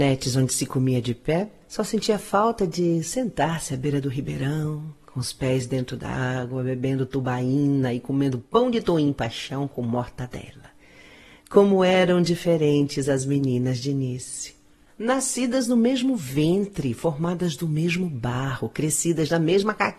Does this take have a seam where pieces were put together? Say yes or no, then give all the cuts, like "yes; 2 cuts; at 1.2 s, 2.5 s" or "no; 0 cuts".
no; 0 cuts